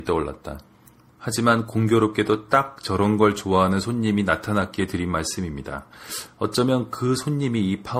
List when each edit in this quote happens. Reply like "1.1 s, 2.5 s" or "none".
1.1 s

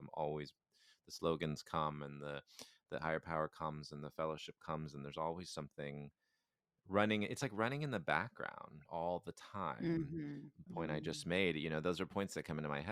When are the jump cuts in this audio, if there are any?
10.7 s

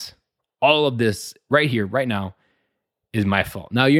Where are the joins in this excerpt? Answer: none

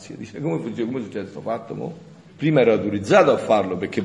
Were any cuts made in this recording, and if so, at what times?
2.3 s

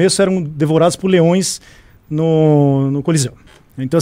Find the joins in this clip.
none

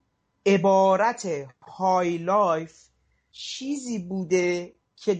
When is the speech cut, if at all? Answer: none

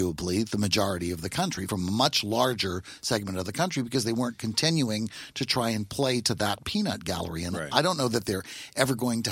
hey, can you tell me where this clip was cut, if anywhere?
none

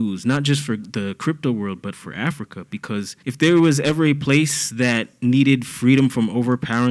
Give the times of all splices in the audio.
1.9 s, 3.2 s

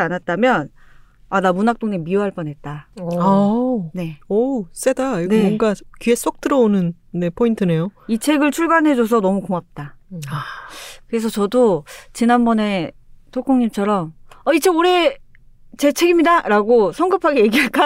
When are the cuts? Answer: none

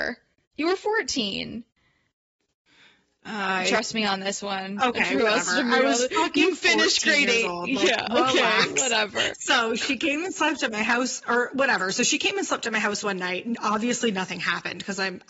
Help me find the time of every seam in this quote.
9.3 s

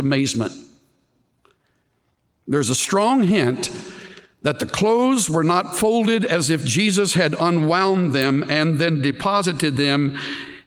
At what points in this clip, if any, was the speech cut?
none

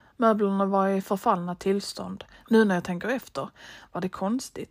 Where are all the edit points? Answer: 2.4 s

